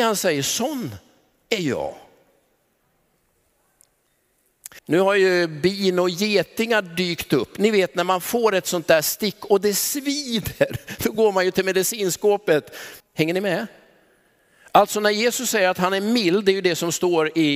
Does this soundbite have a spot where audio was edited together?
yes; 2 cuts; at 4.8 s, 13.0 s

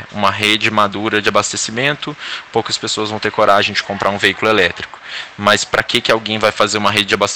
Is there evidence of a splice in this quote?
no; 0 cuts

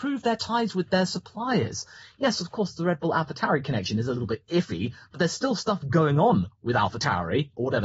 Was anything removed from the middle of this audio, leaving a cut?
no; 0 cuts

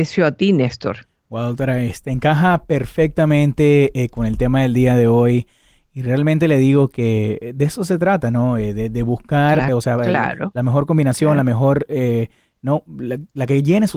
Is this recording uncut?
no; 1 cut; at 9.7 s

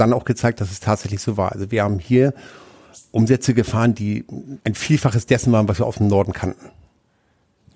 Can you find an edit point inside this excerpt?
yes; 1 cut; at 4.6 s

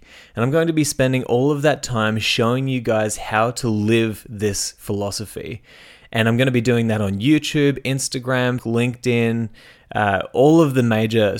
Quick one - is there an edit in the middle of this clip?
yes; 1 cut; at 8.6 s

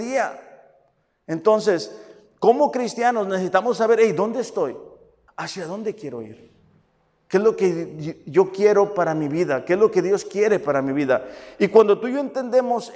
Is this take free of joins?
no; 1 cut; at 5.3 s

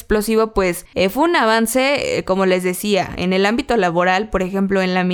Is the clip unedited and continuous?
yes; 0 cuts

